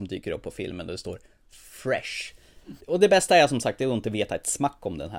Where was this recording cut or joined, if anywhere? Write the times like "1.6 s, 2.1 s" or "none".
2.8 s